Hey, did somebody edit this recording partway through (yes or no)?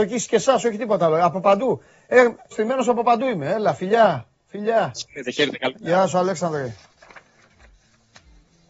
yes